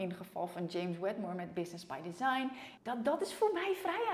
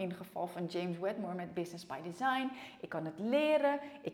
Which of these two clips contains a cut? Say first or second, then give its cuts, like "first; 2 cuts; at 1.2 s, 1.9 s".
first; 1 cut; at 2.8 s